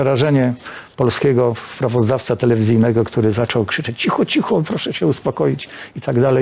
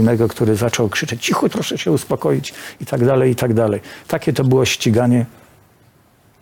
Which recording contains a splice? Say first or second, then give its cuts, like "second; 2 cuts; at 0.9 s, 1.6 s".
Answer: second; 1 cut; at 1.5 s